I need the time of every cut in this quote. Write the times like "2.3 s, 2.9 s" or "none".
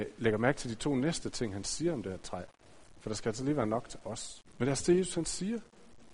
3.0 s, 4.4 s